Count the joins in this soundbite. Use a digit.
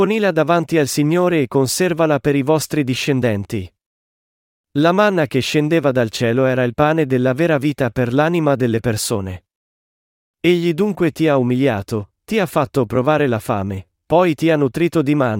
0